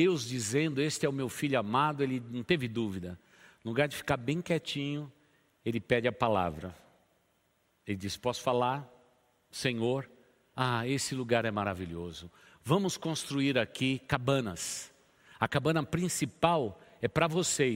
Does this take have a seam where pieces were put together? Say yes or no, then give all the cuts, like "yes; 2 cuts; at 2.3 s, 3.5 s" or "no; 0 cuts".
no; 0 cuts